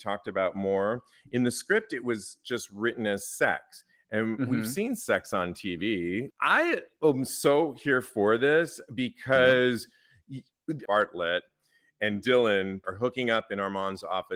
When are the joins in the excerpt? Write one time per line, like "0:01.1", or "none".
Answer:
0:06.3
0:10.9
0:12.8

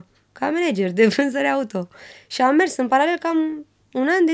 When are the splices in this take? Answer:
none

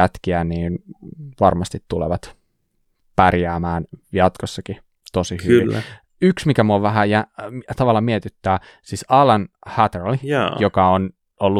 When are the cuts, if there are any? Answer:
none

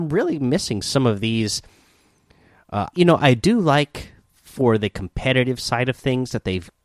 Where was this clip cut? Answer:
0:02.9

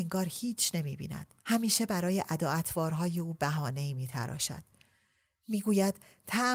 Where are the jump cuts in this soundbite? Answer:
0:01.4

